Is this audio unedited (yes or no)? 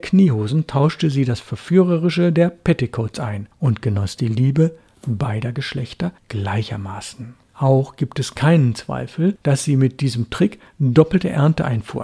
no